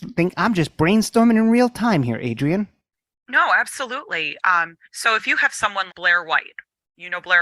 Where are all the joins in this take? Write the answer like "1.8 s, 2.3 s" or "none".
4.8 s, 5.9 s